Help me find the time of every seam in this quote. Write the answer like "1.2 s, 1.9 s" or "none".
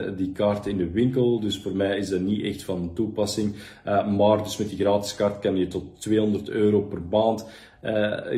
none